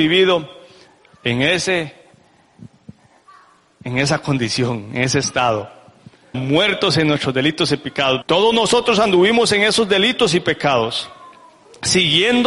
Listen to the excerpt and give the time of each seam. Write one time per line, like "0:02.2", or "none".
0:06.3
0:08.2